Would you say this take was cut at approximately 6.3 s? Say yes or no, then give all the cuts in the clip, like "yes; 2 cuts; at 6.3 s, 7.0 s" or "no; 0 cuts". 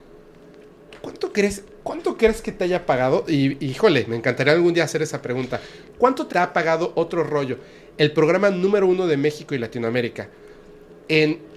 yes; 1 cut; at 6.3 s